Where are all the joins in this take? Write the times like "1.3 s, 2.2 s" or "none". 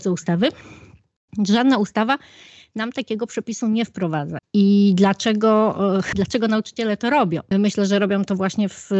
4.4 s, 7.5 s